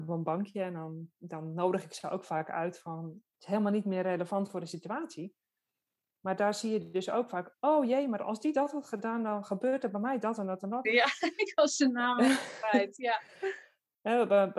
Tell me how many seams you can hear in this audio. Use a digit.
2